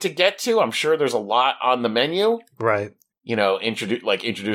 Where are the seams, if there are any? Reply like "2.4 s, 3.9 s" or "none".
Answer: none